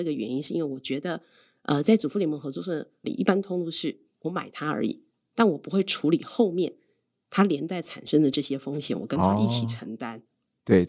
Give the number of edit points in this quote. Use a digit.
1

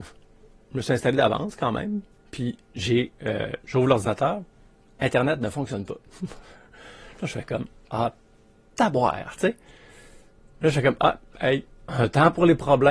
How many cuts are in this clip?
0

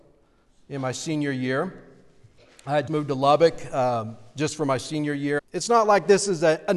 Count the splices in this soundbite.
2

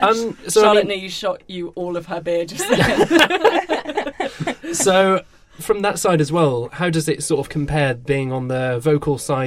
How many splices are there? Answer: 1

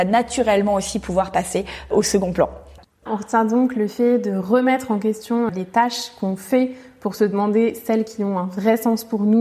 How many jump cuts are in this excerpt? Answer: 1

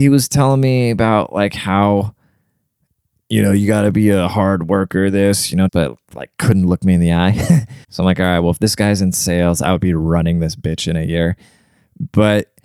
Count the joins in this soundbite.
2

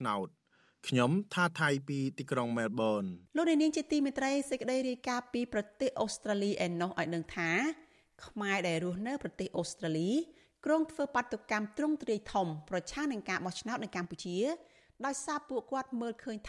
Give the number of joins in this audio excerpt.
1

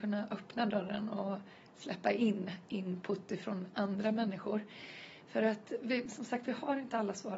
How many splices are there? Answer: 0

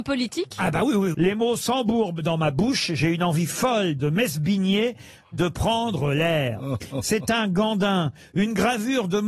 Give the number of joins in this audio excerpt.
1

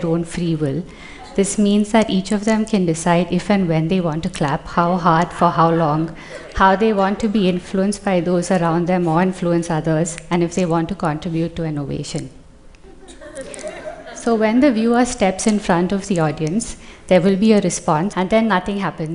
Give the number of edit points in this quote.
1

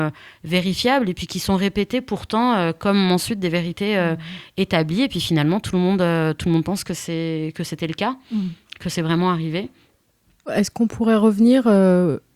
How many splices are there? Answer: 0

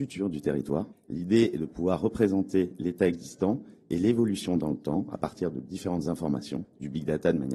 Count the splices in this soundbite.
2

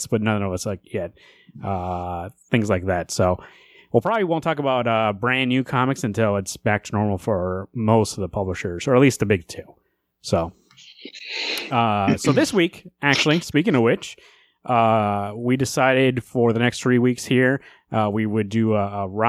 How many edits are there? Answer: 0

